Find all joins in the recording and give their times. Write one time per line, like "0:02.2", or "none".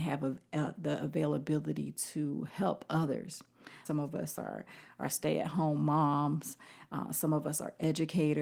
0:03.9